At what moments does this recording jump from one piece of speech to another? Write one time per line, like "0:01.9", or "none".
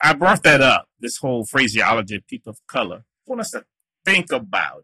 0:03.3